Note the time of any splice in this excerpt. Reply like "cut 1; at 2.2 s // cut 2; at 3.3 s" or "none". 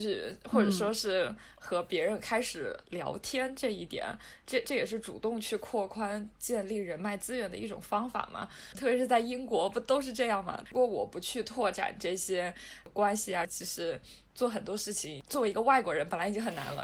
cut 1; at 8.7 s // cut 2; at 10.7 s // cut 3; at 13.4 s